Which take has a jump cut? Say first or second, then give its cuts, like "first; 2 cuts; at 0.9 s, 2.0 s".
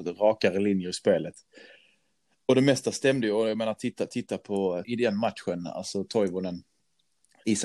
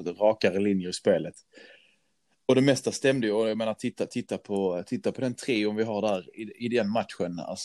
first; 1 cut; at 4.8 s